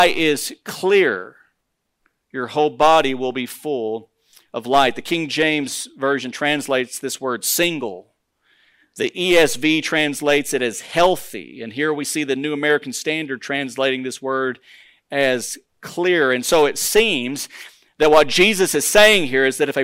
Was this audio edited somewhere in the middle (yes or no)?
no